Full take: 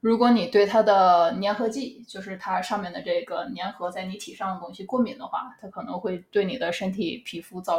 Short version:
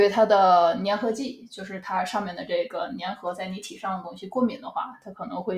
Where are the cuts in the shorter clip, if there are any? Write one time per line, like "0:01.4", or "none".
none